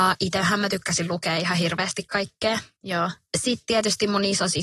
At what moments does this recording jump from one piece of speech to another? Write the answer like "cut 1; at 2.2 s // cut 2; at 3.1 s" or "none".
cut 1; at 3.3 s

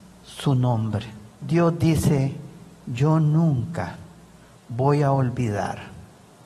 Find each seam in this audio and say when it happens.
cut 1; at 1.4 s

